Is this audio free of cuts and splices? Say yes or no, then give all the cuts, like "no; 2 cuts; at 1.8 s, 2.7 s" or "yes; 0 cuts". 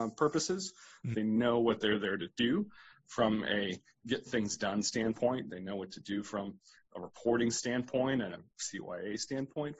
no; 2 cuts; at 1.1 s, 5.5 s